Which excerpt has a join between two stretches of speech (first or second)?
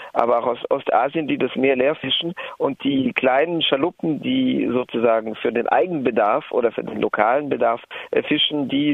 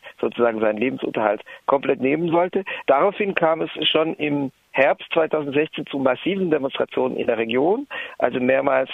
second